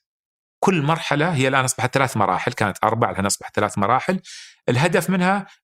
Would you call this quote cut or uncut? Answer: uncut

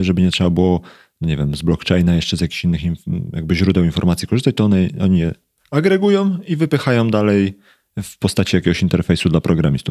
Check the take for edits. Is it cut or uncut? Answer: uncut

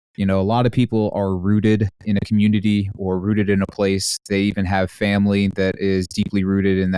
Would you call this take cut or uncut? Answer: uncut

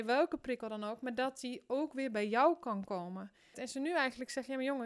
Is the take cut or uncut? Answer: cut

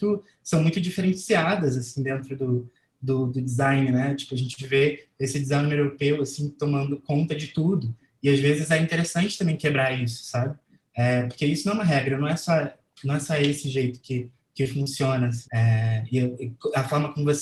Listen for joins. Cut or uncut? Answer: cut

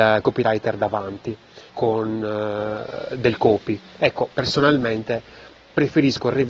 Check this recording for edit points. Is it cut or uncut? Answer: cut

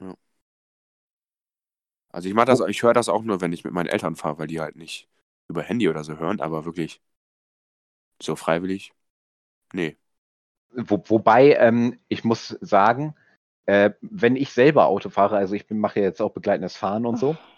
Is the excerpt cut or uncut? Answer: cut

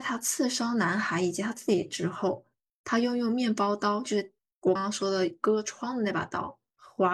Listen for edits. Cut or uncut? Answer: cut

